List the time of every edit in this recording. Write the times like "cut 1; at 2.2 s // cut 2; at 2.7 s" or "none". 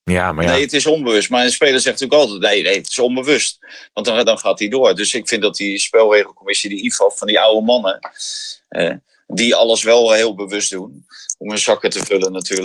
cut 1; at 4.2 s